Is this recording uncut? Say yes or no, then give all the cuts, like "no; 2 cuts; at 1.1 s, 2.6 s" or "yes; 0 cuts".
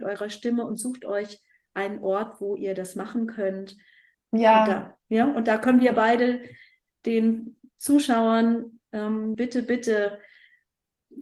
no; 2 cuts; at 4.1 s, 9.3 s